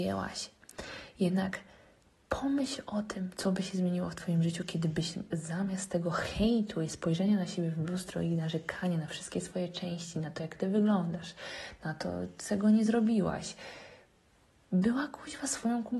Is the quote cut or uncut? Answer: uncut